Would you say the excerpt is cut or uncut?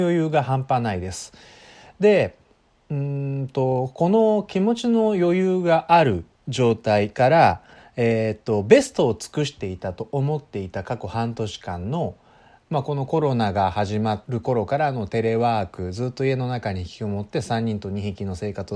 uncut